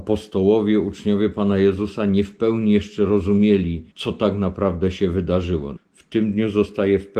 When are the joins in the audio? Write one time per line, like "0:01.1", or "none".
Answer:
0:03.9
0:05.8